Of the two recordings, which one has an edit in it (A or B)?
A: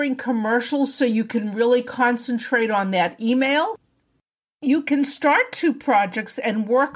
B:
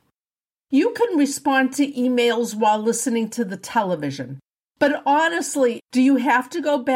B